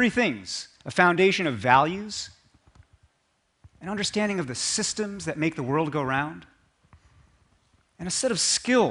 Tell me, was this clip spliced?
yes; 1 cut; at 3.7 s

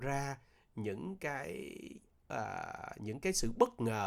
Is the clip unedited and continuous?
yes; 0 cuts

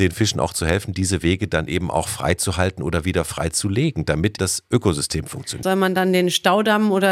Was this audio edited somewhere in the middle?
yes; 2 cuts; at 4.4 s, 5.6 s

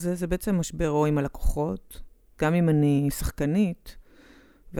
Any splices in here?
yes; 1 cut; at 2.4 s

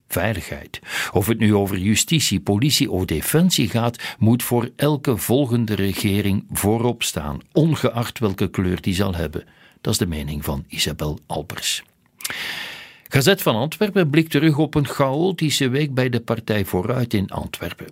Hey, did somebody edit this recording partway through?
no; 0 cuts

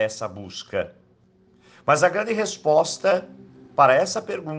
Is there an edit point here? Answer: no; 0 cuts

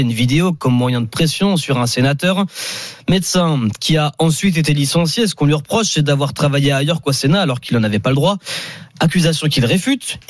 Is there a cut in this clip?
no; 0 cuts

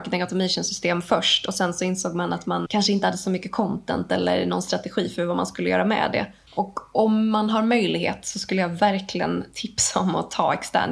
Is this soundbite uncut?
no; 2 cuts; at 2.7 s, 6.5 s

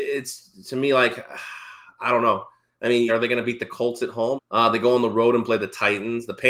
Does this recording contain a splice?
yes; 2 cuts; at 3.1 s, 4.4 s

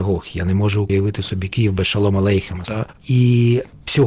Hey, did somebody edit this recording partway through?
yes; 1 cut; at 2.6 s

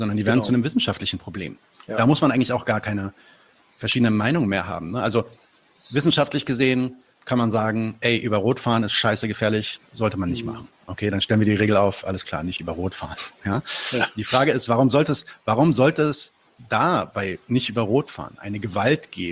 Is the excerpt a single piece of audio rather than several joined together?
yes; 0 cuts

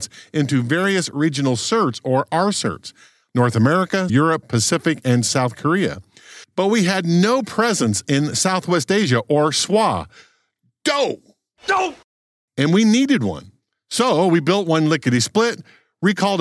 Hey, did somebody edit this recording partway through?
yes; 1 cut; at 4.1 s

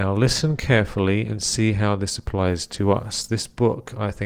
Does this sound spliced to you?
no; 0 cuts

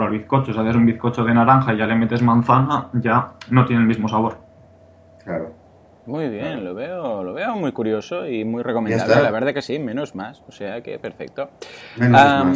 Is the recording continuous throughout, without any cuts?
yes; 0 cuts

